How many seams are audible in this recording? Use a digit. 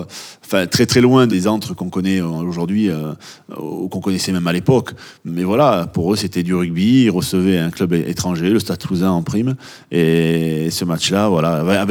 0